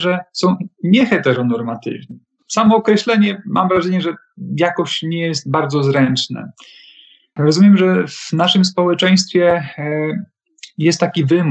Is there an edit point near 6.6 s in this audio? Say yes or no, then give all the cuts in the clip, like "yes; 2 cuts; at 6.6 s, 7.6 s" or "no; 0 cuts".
no; 1 cut; at 2.4 s